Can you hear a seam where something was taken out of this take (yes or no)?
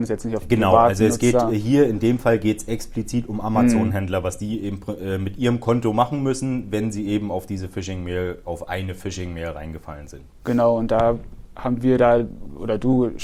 no